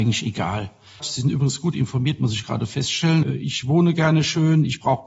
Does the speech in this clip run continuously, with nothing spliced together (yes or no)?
no